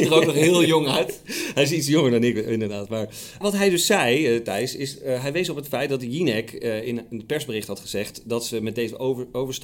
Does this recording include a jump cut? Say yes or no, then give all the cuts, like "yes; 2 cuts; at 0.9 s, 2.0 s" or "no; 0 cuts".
yes; 1 cut; at 3.4 s